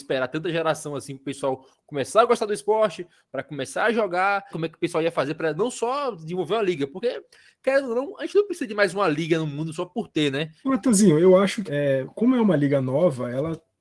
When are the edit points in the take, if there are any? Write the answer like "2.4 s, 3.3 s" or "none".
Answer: 4.5 s, 10.6 s, 11.7 s